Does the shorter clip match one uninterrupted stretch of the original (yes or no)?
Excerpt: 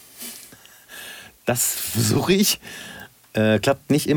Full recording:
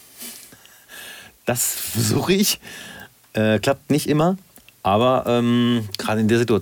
yes